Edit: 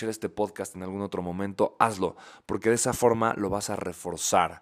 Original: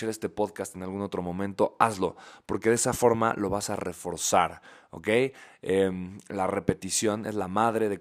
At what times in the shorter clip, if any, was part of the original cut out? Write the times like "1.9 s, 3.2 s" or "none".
none